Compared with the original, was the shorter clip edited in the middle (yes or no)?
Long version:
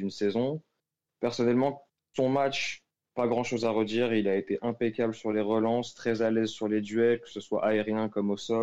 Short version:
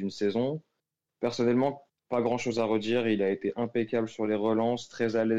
yes